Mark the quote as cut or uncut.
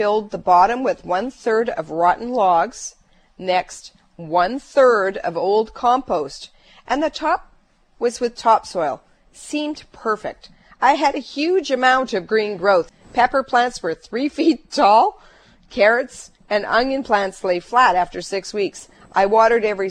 uncut